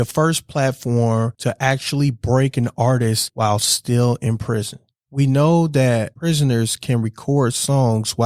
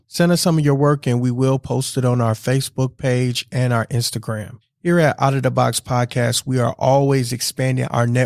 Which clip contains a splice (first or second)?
second